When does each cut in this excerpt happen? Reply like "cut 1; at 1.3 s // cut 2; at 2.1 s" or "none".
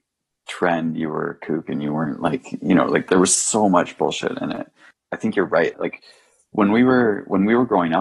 cut 1; at 5.7 s